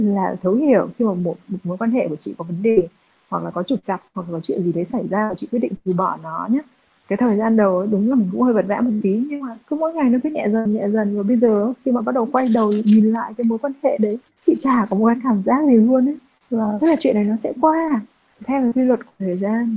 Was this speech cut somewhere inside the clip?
yes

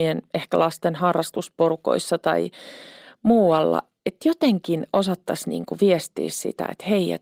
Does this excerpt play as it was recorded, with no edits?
yes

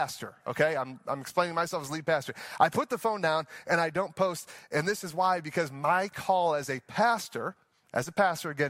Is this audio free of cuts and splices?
yes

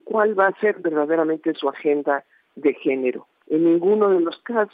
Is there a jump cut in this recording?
yes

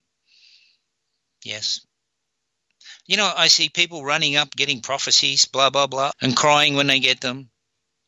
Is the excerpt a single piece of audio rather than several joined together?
no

